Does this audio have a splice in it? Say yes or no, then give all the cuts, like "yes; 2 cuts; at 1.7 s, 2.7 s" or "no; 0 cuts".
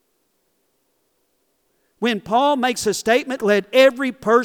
yes; 1 cut; at 3.4 s